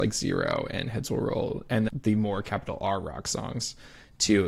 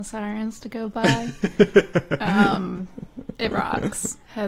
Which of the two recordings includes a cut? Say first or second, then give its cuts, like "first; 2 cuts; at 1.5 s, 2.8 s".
first; 1 cut; at 1.9 s